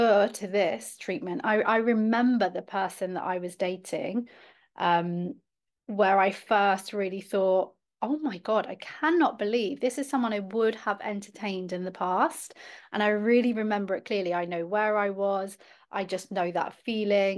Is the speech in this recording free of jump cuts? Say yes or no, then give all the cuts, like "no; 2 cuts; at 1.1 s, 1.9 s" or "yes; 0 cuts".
yes; 0 cuts